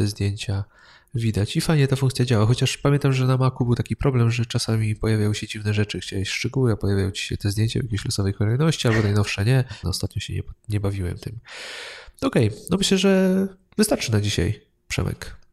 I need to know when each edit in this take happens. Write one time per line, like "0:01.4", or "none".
0:09.8